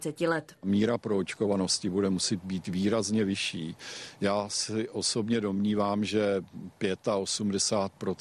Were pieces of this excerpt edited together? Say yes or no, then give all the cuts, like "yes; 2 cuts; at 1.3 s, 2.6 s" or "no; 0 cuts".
no; 0 cuts